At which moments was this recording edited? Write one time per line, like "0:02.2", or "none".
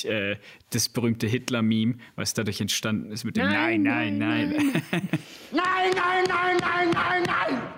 none